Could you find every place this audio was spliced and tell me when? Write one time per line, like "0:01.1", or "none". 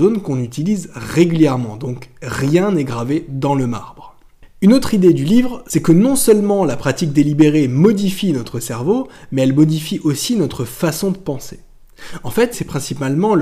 0:12.5